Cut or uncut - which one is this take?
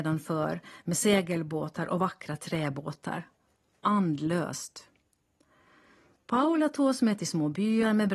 uncut